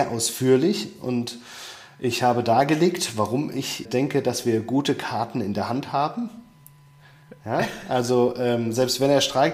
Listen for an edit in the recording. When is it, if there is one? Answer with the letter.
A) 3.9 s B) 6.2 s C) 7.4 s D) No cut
A